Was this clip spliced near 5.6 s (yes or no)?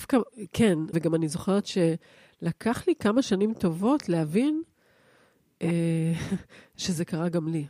no